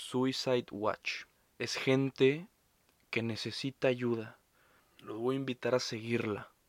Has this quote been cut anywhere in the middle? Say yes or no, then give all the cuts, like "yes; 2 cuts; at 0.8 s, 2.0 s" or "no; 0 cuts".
yes; 2 cuts; at 1.4 s, 4.8 s